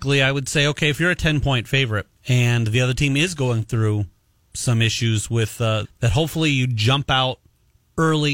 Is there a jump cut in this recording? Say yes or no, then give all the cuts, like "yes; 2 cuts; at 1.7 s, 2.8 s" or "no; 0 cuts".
yes; 2 cuts; at 2.2 s, 5.8 s